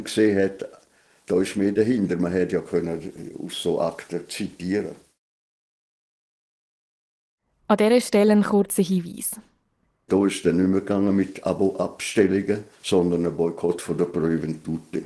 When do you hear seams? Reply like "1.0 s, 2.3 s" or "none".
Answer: 10.1 s, 12.7 s